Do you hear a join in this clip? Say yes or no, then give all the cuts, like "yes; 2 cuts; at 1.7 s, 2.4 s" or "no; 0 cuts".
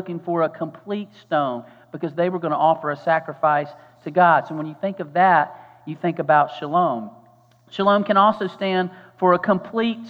no; 0 cuts